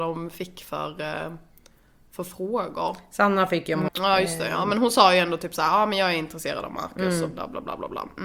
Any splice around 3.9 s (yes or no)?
yes